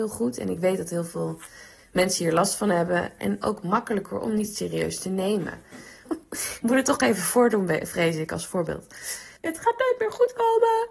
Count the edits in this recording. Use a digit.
3